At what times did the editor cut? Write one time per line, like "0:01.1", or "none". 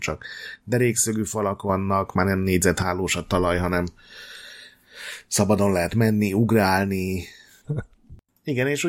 0:07.6